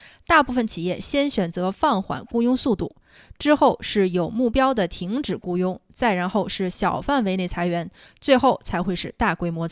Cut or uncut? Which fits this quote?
uncut